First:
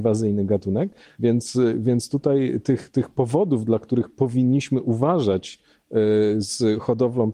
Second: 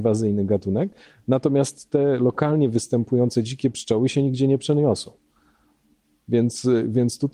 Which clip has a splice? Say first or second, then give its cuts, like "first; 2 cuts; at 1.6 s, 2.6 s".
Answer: first; 1 cut; at 1.1 s